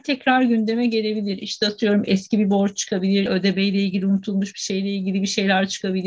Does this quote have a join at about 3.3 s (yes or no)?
yes